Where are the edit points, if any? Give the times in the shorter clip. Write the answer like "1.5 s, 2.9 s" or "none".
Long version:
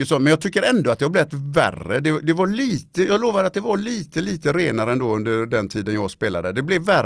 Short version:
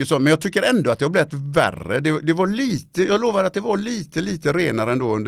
none